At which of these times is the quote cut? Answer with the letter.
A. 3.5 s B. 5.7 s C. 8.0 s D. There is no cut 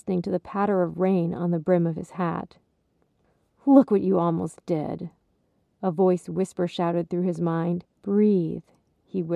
C